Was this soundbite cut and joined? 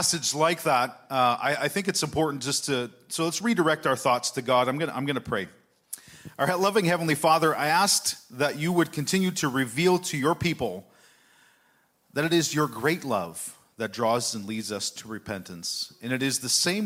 no; 0 cuts

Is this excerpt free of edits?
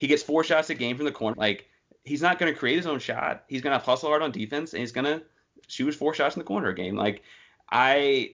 no; 1 cut; at 1.3 s

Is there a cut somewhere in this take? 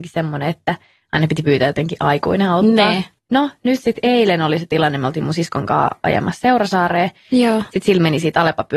no; 0 cuts

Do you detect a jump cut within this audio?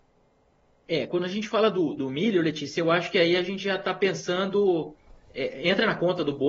no; 0 cuts

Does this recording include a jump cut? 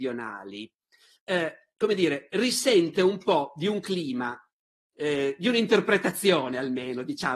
no; 0 cuts

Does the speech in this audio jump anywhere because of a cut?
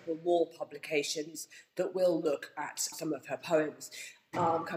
yes; 1 cut; at 2.9 s

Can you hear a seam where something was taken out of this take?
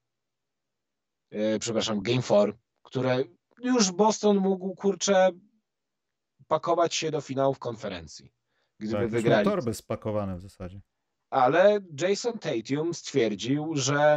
no; 0 cuts

